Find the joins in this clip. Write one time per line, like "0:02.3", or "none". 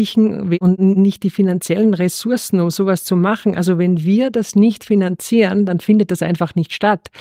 none